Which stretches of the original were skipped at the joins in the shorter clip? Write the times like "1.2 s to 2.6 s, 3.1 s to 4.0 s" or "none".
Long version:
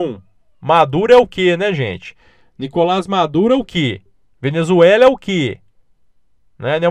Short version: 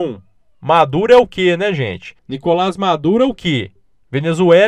2.2 s to 2.5 s